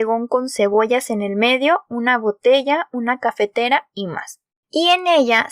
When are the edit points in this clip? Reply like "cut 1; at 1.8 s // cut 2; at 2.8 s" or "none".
cut 1; at 4.5 s